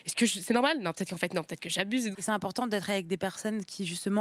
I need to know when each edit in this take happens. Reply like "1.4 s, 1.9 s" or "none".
2.2 s